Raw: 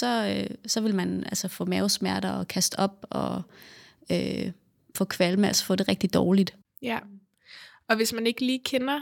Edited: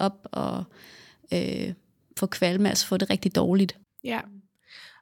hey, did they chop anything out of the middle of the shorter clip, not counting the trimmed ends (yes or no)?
no